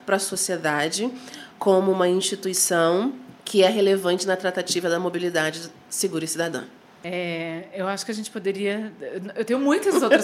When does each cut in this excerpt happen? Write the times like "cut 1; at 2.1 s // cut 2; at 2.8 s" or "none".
cut 1; at 3.4 s